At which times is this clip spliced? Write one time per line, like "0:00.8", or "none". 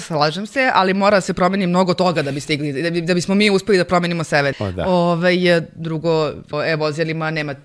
0:04.5
0:06.5